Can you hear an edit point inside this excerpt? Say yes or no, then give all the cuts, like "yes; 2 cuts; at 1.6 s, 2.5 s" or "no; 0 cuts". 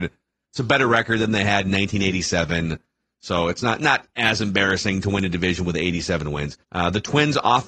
yes; 1 cut; at 6.6 s